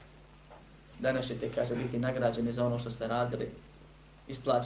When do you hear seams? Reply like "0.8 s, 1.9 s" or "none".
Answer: 0.9 s